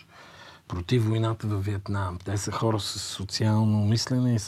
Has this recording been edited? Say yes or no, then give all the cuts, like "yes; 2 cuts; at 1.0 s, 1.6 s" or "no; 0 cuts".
no; 0 cuts